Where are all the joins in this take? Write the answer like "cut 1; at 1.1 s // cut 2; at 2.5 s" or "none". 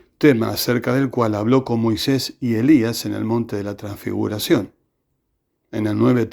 none